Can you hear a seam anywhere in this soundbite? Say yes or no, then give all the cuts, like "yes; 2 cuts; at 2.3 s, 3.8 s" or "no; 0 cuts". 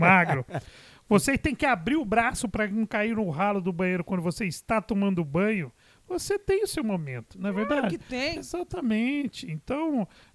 yes; 1 cut; at 8.4 s